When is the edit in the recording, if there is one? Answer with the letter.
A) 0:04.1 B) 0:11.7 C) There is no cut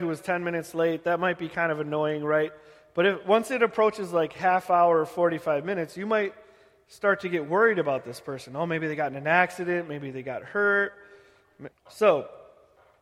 B